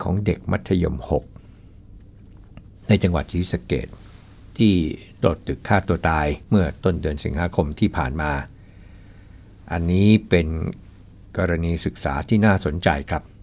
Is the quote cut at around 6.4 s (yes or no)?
yes